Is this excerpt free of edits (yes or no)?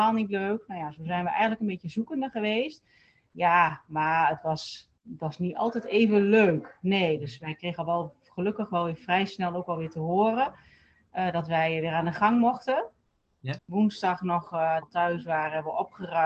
no